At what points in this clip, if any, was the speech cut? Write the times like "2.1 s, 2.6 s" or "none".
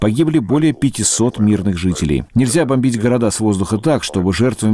2.3 s